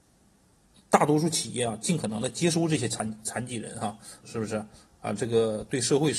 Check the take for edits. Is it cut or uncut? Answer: cut